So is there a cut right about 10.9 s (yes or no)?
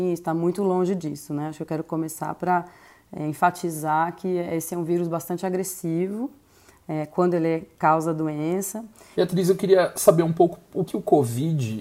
yes